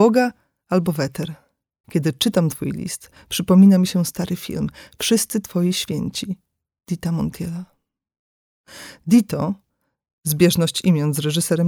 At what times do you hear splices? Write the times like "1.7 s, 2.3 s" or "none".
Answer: 1.8 s